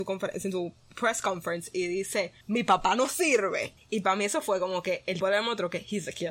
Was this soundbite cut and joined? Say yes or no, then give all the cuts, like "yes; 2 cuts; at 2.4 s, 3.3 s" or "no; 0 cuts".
yes; 3 cuts; at 2.4 s, 3.8 s, 5.2 s